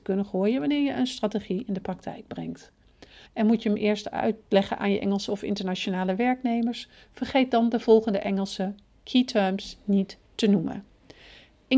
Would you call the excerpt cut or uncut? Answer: cut